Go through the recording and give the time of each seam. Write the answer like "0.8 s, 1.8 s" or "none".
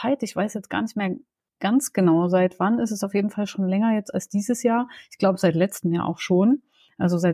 none